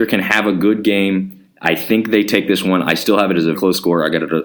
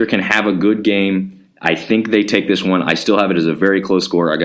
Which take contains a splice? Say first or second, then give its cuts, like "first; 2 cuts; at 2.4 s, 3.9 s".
first; 1 cut; at 3.5 s